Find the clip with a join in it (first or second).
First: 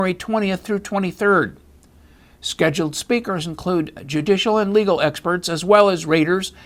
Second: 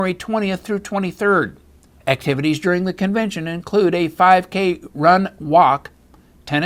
second